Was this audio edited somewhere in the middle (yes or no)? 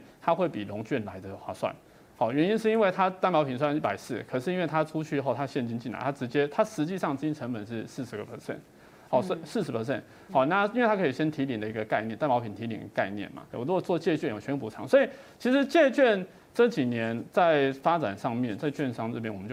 yes